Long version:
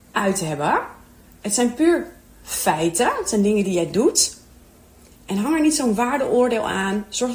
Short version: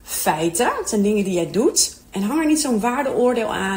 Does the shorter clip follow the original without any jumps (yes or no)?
no